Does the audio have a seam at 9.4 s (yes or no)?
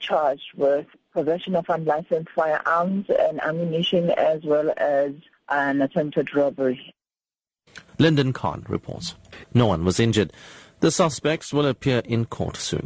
yes